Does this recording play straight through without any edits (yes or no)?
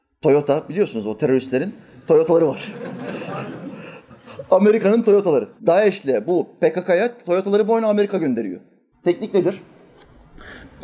no